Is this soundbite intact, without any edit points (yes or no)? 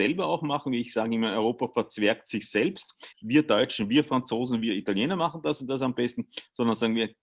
no